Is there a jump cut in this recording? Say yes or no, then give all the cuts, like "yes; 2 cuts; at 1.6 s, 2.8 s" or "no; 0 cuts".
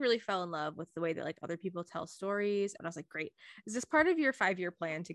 yes; 1 cut; at 2.8 s